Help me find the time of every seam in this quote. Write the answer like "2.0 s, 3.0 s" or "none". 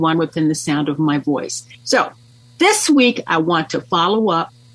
1.7 s